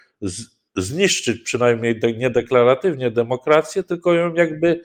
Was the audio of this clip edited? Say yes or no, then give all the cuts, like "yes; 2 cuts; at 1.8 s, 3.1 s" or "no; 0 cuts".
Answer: no; 0 cuts